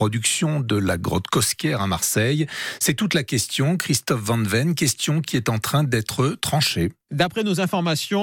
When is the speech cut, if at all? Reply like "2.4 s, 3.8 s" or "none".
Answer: 7.0 s